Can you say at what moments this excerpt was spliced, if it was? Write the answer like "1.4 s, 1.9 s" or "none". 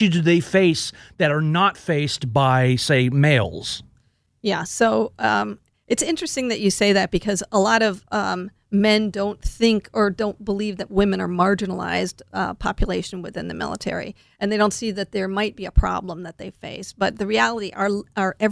none